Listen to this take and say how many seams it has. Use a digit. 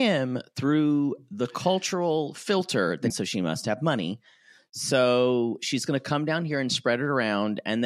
1